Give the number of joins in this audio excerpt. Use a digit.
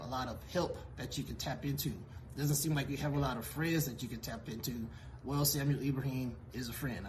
0